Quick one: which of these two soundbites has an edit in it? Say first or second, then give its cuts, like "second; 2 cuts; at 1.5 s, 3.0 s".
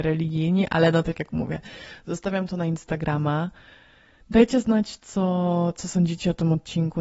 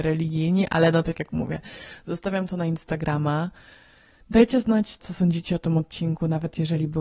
second; 1 cut; at 5.0 s